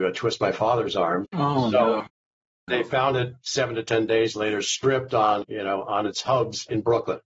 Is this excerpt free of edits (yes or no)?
no